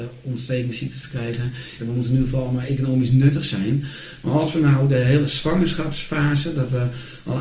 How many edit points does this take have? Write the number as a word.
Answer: one